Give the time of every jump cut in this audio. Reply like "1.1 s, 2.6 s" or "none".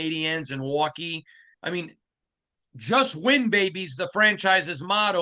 1.5 s